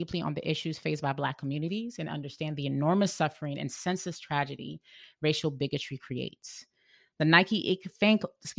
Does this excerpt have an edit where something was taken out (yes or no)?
no